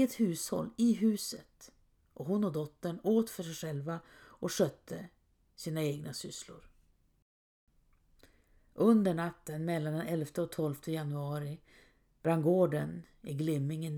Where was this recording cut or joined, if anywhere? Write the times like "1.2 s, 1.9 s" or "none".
none

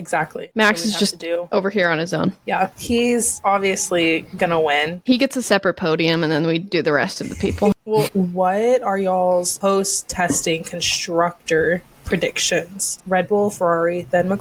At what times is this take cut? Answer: 8.1 s, 13.0 s

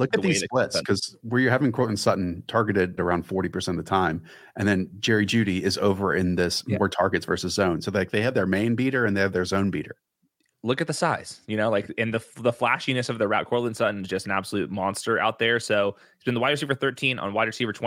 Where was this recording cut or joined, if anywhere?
3.0 s

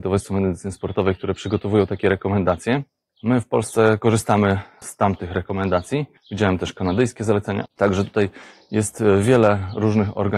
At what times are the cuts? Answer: 6.2 s, 7.7 s

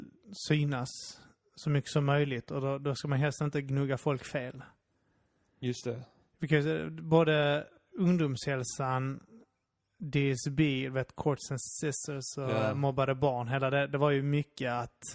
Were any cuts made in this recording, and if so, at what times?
none

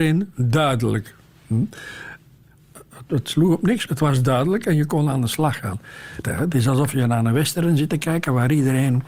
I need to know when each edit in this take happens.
3.9 s, 6.2 s

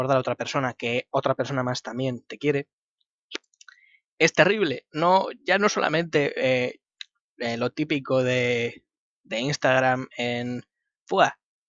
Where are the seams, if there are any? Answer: none

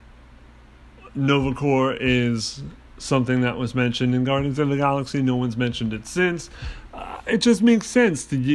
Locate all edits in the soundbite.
none

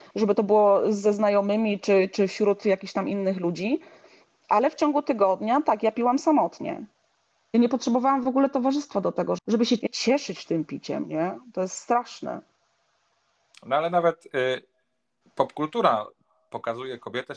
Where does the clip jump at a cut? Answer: 9.4 s

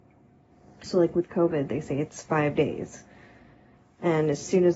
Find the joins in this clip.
none

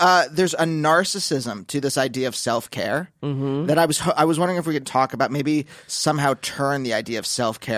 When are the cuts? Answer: 4.8 s

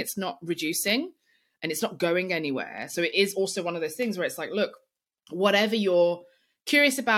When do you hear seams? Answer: none

